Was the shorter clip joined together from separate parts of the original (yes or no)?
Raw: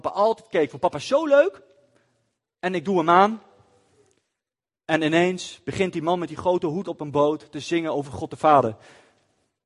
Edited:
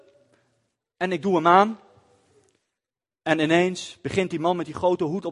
no